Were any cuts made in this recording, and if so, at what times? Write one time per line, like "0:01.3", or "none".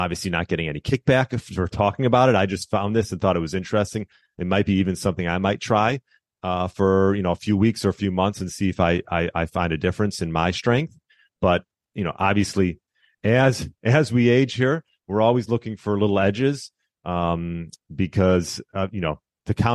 none